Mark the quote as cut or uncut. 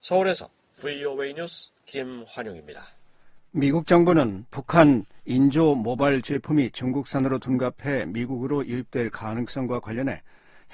uncut